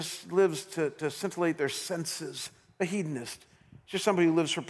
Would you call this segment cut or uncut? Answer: uncut